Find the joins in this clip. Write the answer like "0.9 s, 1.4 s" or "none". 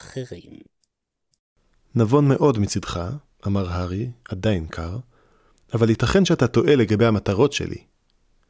none